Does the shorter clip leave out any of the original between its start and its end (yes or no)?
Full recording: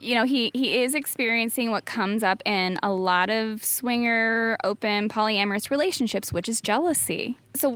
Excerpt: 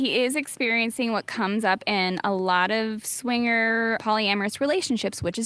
yes